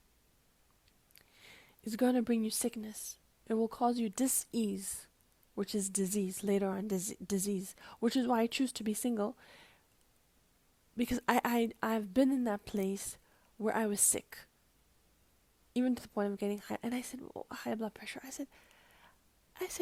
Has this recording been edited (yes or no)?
no